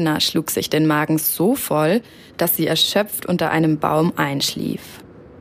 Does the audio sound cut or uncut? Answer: uncut